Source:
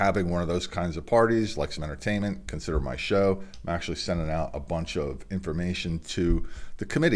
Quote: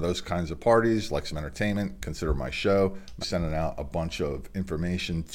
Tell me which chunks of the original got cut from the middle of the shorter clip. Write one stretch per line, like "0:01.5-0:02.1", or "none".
0:03.7-0:04.0